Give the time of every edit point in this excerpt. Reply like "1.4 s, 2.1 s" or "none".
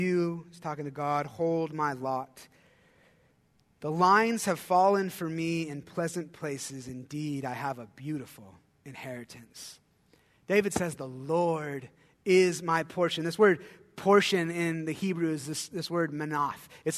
none